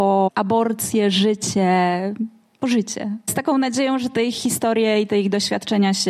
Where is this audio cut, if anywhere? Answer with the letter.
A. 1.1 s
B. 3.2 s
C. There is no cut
C